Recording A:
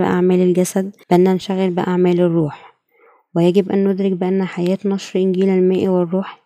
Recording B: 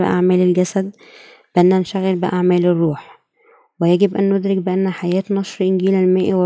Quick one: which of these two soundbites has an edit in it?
A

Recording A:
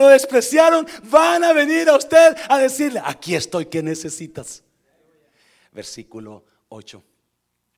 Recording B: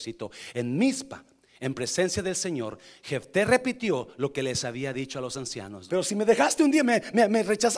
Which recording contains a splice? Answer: B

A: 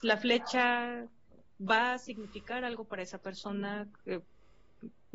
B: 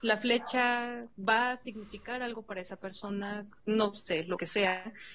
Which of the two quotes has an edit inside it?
B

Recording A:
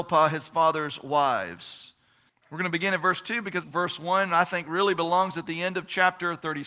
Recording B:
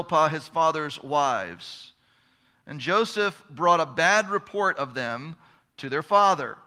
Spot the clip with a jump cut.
A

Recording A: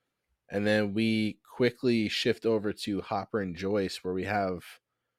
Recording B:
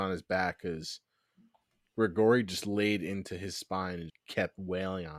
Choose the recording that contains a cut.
B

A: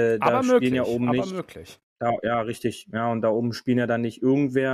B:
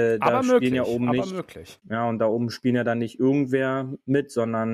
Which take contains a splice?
B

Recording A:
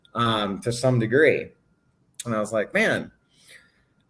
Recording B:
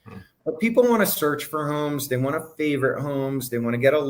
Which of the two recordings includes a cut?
A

